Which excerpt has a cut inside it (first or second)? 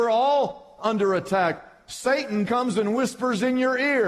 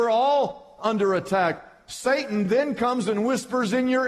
first